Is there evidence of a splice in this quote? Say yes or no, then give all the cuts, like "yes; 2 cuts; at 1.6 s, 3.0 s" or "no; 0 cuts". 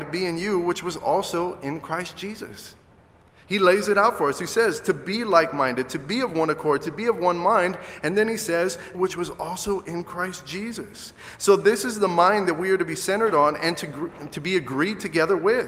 yes; 1 cut; at 8.9 s